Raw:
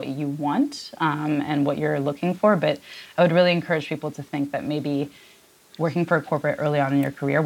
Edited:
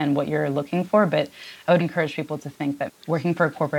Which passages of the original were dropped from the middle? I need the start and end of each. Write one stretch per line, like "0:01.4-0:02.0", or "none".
0:03.3-0:03.5
0:04.6-0:05.6